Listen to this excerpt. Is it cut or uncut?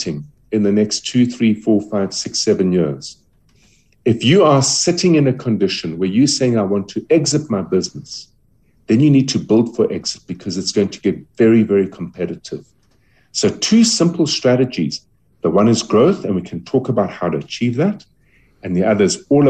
uncut